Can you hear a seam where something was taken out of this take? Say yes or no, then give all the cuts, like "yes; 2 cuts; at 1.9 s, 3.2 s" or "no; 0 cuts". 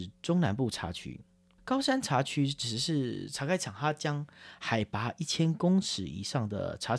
yes; 1 cut; at 1.6 s